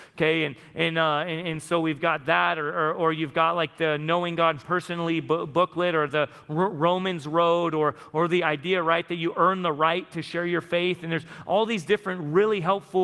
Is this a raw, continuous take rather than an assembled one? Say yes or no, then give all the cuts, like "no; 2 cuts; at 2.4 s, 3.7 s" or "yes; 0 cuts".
yes; 0 cuts